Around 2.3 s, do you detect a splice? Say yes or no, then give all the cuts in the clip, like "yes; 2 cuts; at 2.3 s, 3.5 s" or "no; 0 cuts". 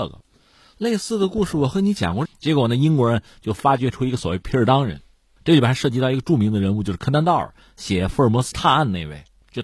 yes; 1 cut; at 2.3 s